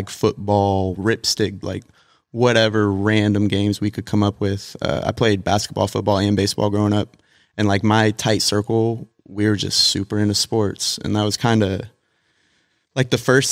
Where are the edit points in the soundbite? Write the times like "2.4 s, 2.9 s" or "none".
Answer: 1.6 s